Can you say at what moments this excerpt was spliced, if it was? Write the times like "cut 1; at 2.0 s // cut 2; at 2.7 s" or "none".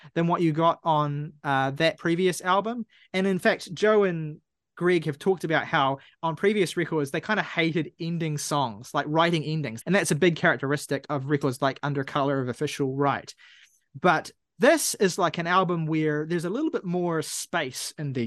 cut 1; at 9.8 s